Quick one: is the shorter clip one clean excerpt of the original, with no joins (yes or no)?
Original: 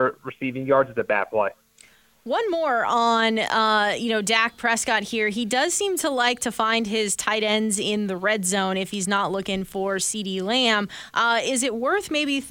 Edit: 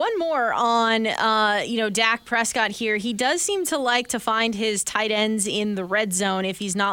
yes